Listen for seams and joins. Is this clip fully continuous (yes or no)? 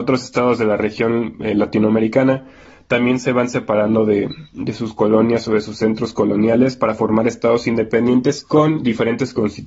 yes